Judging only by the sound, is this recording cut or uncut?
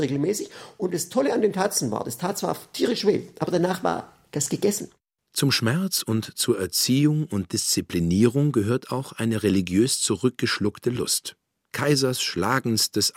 uncut